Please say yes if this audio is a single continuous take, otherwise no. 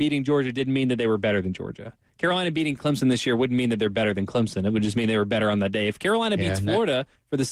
yes